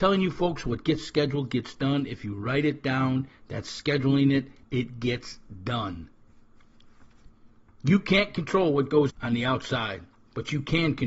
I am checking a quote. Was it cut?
yes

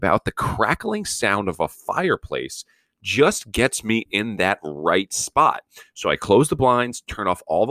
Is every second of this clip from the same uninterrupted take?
yes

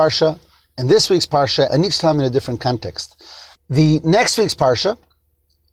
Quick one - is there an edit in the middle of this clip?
yes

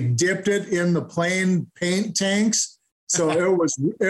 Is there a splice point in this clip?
no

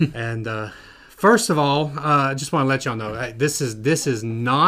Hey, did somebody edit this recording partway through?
no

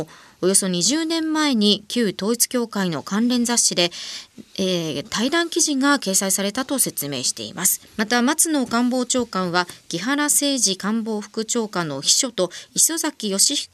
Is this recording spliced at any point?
yes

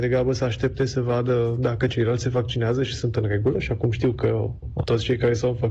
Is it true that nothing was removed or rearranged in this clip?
no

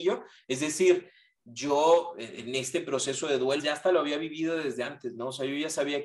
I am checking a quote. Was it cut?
yes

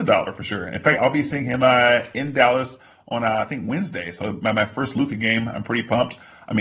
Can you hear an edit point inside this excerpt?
no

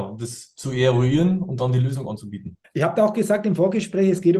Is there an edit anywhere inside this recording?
yes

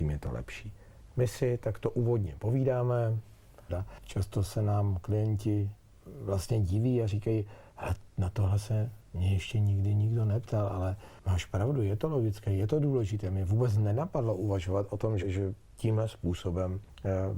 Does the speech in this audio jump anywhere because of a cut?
yes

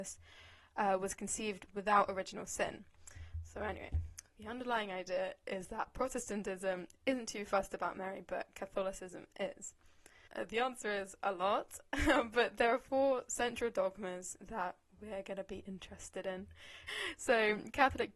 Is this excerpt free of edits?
no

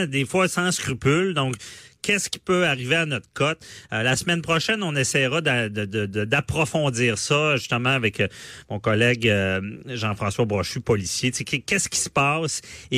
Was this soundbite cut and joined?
no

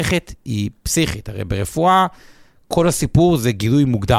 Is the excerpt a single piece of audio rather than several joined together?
yes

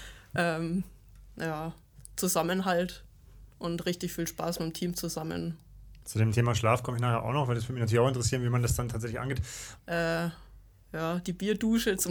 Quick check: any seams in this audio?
yes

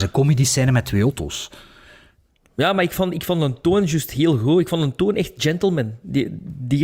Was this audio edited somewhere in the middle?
no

